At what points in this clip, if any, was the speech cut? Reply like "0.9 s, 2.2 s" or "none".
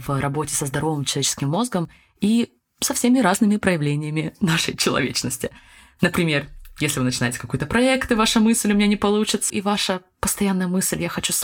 9.5 s